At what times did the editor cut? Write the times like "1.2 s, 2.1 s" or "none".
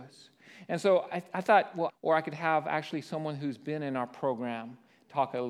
1.9 s